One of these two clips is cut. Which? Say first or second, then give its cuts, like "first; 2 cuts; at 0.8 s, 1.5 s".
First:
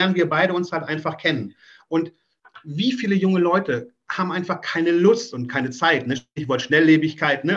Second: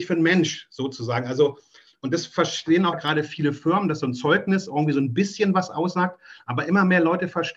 second; 1 cut; at 2.9 s